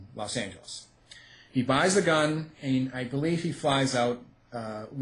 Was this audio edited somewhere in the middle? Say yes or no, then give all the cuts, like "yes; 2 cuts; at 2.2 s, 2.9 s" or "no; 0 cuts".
no; 0 cuts